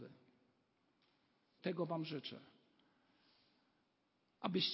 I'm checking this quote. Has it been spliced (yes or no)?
yes